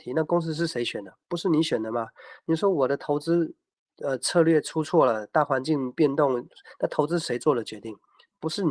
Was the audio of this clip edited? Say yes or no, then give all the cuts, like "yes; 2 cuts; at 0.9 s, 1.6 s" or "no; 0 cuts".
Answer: no; 0 cuts